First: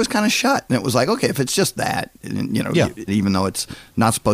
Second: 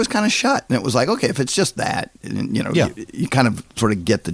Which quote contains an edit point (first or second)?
first